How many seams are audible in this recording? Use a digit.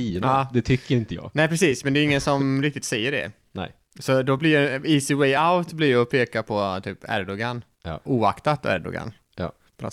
1